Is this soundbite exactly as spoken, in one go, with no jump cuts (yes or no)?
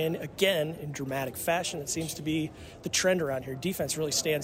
yes